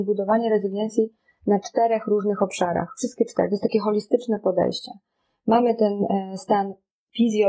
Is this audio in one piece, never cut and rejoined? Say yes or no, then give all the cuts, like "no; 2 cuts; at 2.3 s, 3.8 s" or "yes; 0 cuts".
yes; 0 cuts